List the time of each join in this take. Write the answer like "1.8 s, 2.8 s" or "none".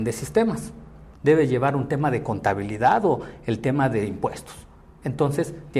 1.1 s